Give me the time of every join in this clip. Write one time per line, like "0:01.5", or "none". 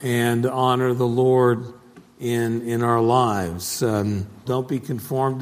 0:04.5